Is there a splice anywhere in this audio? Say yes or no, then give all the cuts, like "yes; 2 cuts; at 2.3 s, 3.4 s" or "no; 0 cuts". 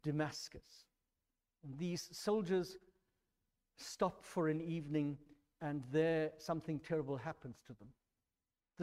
no; 0 cuts